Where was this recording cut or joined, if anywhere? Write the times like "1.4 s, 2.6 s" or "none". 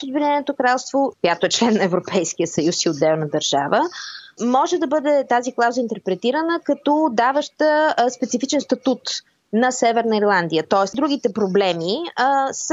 1.1 s, 10.9 s

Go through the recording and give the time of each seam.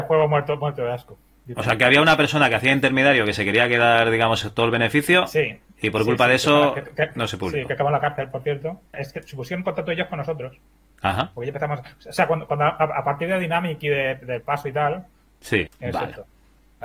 8.9 s, 15.7 s

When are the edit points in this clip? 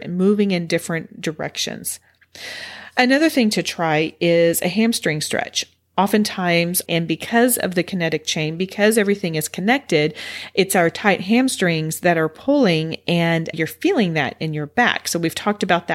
6.9 s, 13.5 s

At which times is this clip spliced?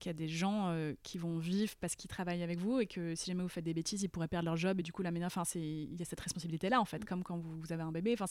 none

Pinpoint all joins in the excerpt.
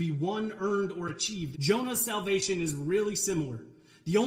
1.5 s

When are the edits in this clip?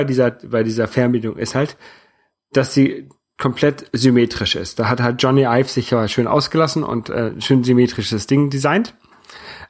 none

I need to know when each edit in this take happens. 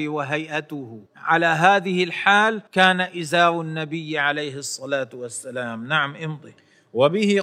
1.1 s, 2.7 s

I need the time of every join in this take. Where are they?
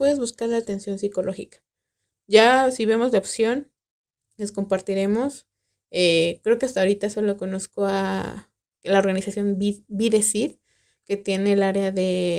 none

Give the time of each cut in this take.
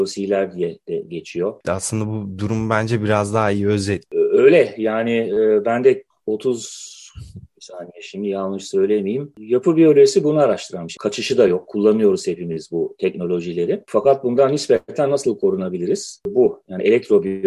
1.6 s, 9.3 s, 11.0 s

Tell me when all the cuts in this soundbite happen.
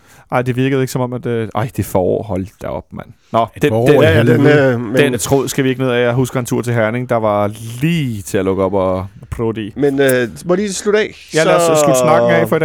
5.1 s

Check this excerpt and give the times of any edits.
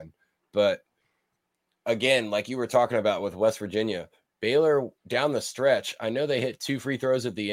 5.0 s

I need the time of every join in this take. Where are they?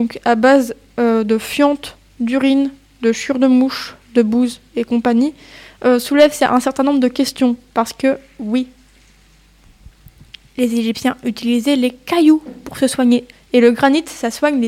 7.7 s, 13.3 s

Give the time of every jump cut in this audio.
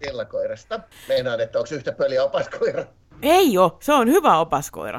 0.9 s

